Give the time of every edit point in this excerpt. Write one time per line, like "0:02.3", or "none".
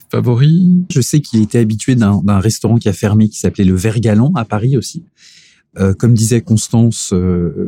0:00.9